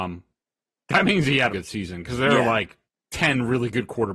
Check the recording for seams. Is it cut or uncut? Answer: cut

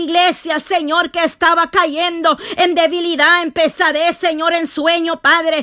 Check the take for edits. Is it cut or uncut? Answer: uncut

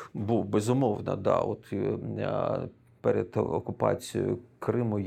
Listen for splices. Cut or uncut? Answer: uncut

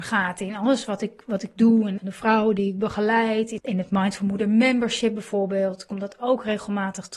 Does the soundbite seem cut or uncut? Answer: cut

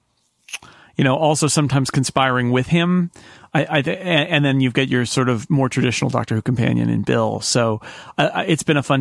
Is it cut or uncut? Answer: uncut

